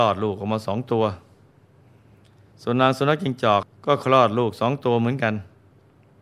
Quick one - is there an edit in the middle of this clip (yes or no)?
yes